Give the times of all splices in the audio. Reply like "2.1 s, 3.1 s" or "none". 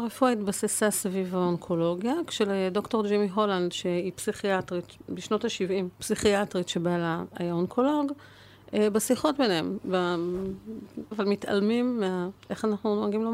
5.9 s, 11.1 s